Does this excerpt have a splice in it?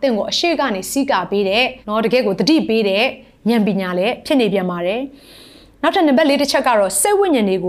yes; 1 cut; at 1.8 s

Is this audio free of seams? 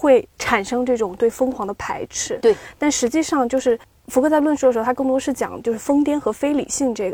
yes; 0 cuts

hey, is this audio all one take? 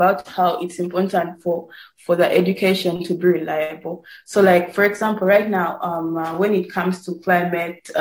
yes; 0 cuts

